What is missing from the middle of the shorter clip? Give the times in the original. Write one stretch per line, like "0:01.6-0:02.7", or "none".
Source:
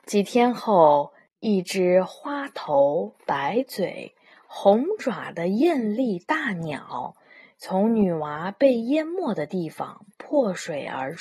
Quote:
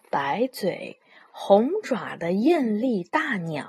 none